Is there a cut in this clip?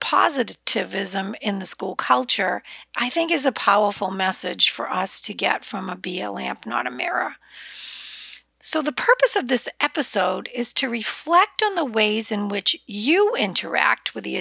no; 0 cuts

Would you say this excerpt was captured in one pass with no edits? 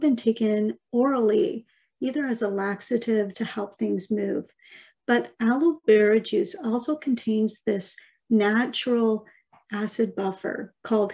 no; 1 cut; at 3.3 s

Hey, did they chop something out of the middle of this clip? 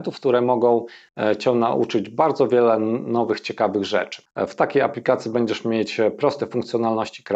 no; 0 cuts

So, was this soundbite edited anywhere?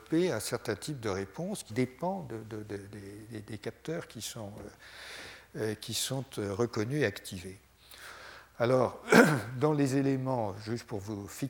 yes; 1 cut; at 1.7 s

